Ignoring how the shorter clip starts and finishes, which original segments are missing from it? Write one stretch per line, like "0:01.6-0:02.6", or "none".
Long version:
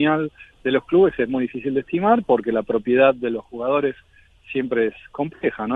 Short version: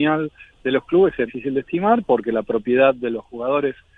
0:01.3-0:01.5